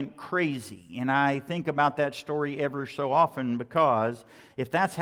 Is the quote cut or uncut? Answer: uncut